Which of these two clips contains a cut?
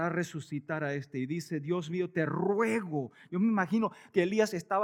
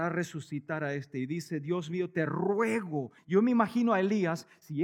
second; 1 cut; at 3.2 s

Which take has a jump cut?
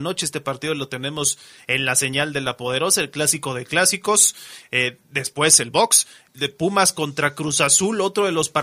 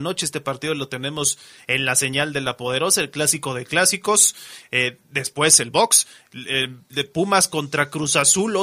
first; 1 cut; at 6.3 s

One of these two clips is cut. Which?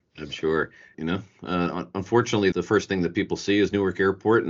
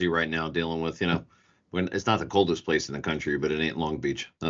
first; 2 cuts; at 0.9 s, 2.5 s

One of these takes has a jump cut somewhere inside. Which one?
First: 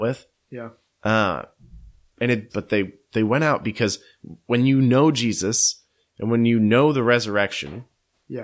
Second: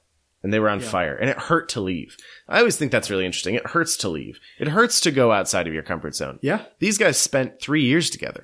first; 1 cut; at 2.5 s

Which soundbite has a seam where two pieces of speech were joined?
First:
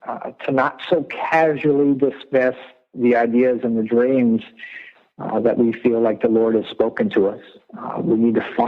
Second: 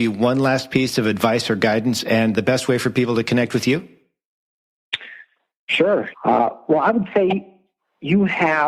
second; 1 cut; at 6.1 s

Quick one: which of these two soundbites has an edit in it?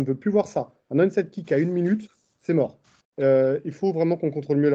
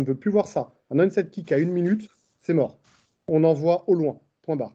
first; 1 cut; at 3.0 s

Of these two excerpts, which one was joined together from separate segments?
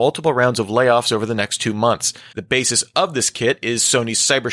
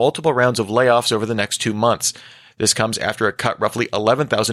first; 1 cut; at 2.3 s

